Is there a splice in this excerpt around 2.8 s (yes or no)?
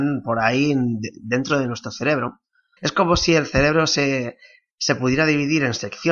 yes